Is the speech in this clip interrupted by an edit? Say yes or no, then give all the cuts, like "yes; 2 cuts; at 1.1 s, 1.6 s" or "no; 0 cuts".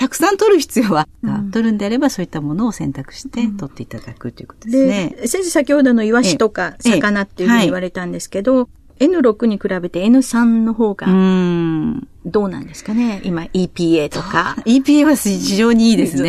yes; 1 cut; at 1.2 s